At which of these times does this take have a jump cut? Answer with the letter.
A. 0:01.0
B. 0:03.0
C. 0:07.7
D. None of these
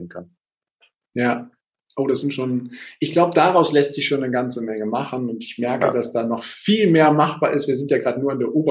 D